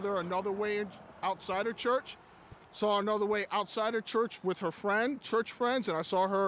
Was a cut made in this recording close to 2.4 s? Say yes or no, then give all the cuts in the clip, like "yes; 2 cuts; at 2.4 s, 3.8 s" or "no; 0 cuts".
no; 0 cuts